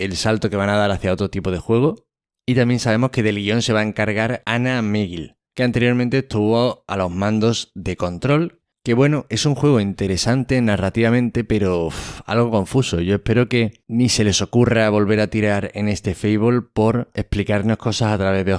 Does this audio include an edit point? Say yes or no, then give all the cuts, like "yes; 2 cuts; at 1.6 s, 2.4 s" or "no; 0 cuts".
no; 0 cuts